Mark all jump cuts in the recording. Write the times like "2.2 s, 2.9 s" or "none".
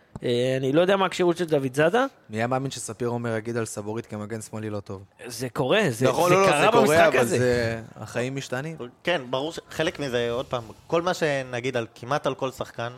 none